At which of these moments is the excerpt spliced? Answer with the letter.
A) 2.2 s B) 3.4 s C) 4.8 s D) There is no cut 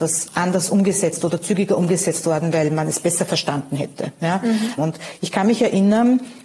C